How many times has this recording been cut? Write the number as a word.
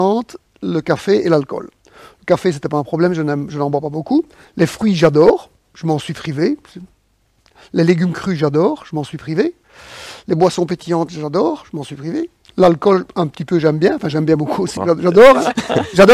one